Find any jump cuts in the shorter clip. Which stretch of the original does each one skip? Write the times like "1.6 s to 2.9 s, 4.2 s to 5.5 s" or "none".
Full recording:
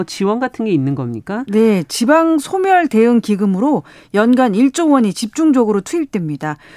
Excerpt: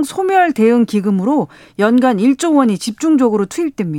none

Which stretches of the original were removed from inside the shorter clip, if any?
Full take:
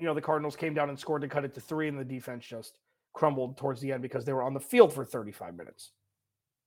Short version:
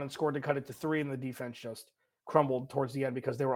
none

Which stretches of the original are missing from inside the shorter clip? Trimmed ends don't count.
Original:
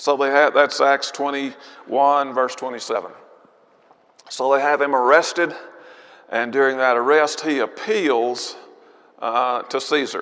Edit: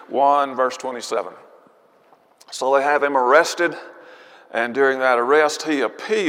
none

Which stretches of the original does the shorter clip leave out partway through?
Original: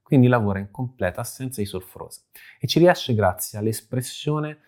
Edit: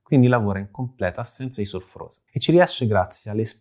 2.3 s to 2.6 s

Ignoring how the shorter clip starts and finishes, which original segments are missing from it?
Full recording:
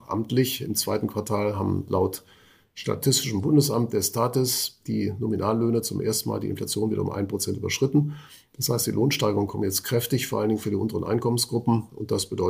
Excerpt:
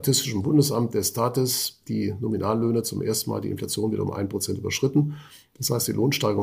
none

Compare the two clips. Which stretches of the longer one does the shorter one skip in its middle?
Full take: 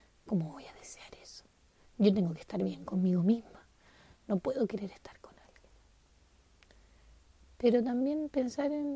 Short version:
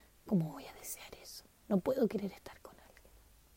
1.6 s to 4.2 s

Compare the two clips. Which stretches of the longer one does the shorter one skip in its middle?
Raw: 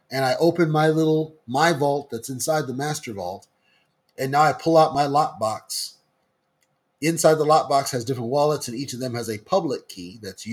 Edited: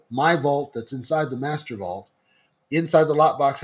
4.0 s to 6.9 s

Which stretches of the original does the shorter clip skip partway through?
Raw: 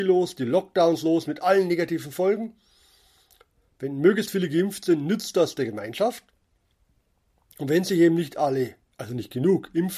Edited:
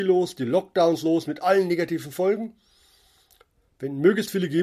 none

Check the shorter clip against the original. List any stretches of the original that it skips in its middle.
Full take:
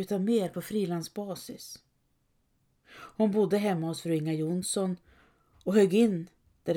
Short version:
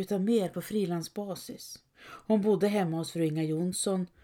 1.9 s to 2.8 s

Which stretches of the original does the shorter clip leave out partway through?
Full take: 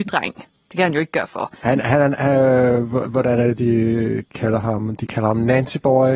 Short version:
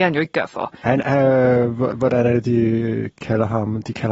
1.8 s to 2.2 s

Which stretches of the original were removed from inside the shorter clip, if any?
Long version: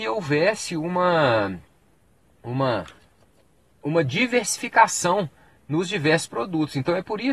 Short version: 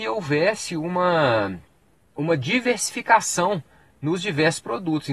2.1 s to 3.8 s

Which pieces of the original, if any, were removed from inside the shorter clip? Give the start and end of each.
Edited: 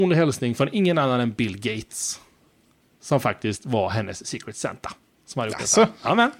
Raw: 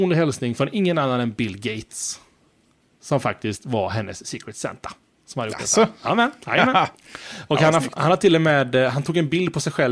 none

